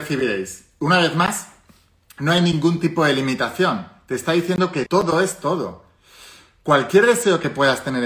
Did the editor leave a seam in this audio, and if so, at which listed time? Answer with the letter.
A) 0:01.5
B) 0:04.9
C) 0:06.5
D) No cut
B